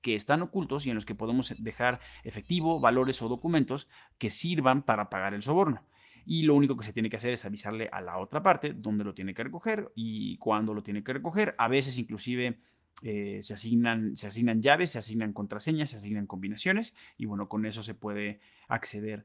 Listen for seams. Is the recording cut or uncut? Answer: uncut